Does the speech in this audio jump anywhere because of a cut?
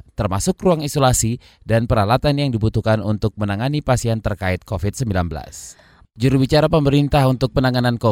yes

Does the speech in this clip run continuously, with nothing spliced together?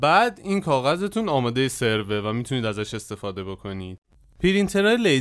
yes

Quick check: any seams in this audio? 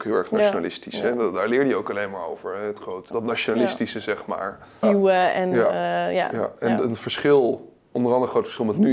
yes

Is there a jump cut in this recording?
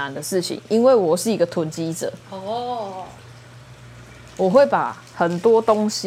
no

